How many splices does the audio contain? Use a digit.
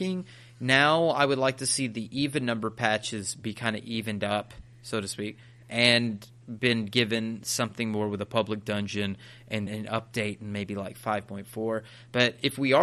1